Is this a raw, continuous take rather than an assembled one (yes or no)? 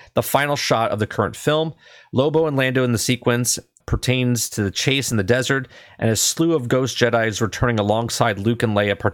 no